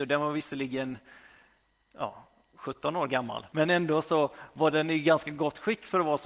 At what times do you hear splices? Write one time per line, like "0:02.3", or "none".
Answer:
0:03.5